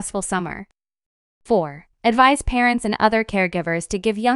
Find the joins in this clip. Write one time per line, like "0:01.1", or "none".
0:01.9